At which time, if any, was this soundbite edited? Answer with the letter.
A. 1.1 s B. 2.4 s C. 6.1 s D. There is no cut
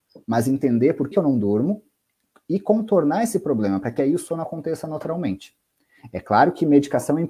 A